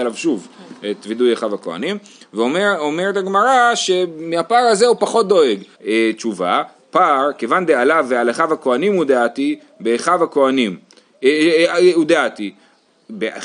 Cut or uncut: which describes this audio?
cut